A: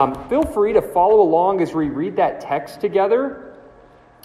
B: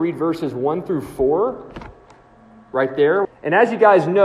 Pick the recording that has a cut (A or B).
B